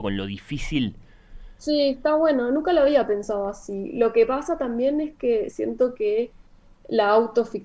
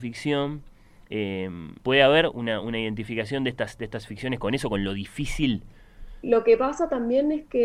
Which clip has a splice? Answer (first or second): second